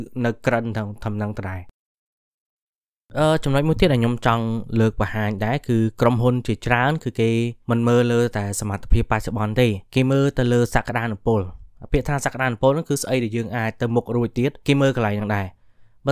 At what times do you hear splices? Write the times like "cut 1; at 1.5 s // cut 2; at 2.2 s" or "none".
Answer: cut 1; at 7.6 s // cut 2; at 9.9 s // cut 3; at 14.6 s